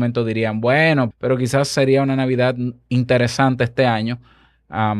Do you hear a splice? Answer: yes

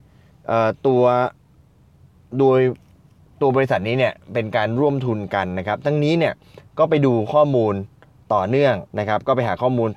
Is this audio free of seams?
no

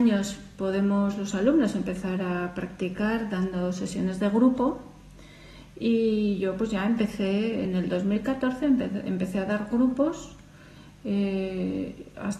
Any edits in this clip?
no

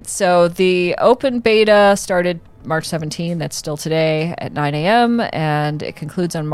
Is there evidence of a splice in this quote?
no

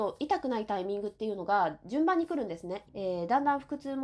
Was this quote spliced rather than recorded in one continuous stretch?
yes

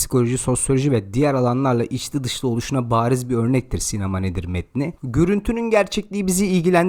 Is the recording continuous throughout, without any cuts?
yes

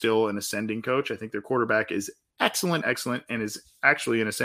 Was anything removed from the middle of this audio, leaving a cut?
yes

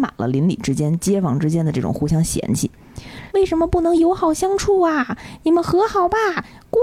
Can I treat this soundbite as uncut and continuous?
no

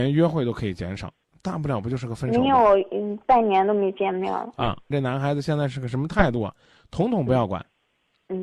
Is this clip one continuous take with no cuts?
no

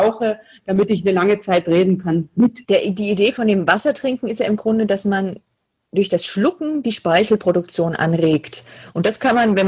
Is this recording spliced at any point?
yes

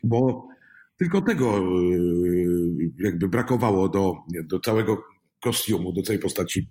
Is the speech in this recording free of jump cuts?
yes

